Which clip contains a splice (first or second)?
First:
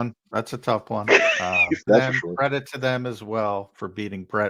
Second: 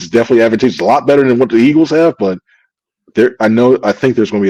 first